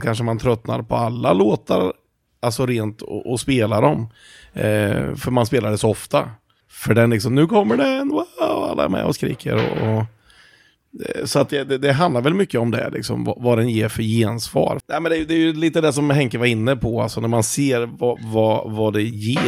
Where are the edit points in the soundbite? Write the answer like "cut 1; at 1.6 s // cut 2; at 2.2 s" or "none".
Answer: cut 1; at 6.6 s // cut 2; at 14.8 s